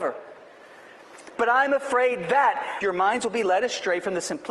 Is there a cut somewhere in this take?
yes; 2 cuts; at 1.4 s, 2.8 s

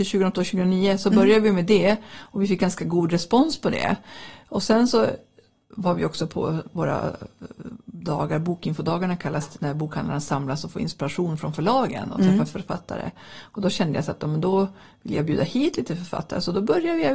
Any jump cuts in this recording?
no; 0 cuts

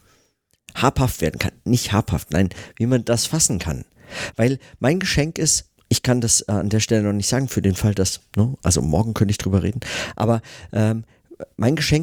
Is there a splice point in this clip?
no; 0 cuts

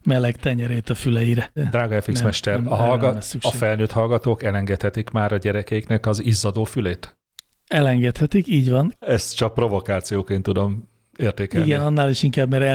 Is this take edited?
yes; 2 cuts; at 1.6 s, 8.9 s

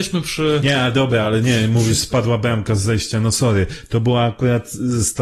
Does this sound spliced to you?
no; 0 cuts

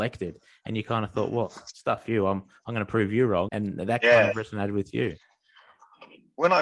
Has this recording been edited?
yes; 1 cut; at 3.5 s

